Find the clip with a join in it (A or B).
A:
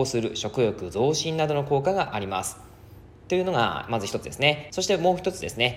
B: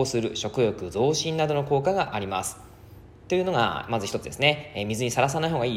A